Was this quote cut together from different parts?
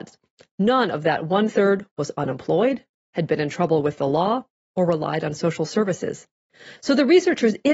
yes; 1 cut; at 6.8 s

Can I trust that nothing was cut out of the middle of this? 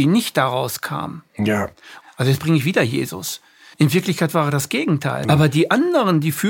no; 3 cuts; at 2.0 s, 3.7 s, 5.2 s

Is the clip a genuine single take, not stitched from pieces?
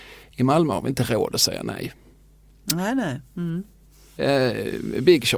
no; 1 cut; at 4.2 s

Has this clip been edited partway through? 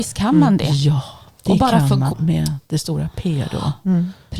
yes; 1 cut; at 2.1 s

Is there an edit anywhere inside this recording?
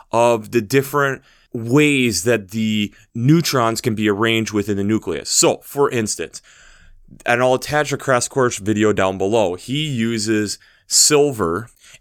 no; 0 cuts

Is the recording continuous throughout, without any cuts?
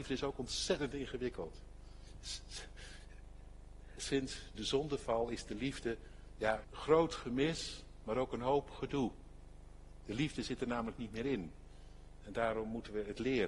no; 1 cut; at 6.6 s

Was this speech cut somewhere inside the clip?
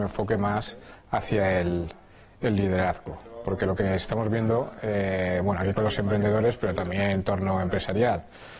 no; 0 cuts

